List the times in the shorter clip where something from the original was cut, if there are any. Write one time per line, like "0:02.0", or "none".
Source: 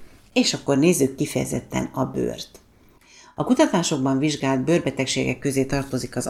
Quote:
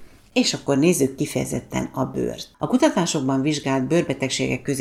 0:02.5